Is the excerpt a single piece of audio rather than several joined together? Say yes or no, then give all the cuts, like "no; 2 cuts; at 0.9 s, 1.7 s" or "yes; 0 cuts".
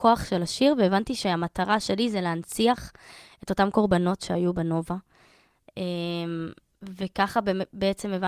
yes; 0 cuts